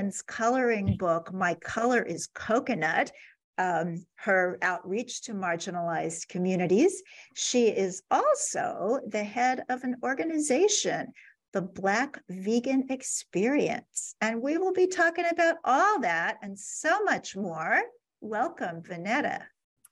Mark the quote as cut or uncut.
cut